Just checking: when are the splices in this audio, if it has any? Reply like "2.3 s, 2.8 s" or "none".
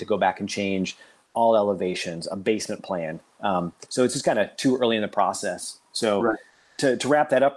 none